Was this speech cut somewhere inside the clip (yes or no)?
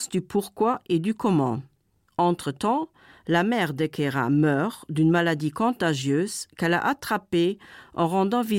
no